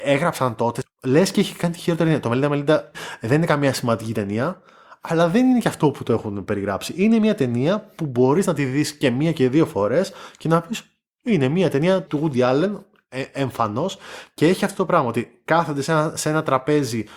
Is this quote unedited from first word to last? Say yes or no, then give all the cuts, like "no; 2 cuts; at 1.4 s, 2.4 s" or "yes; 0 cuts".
yes; 0 cuts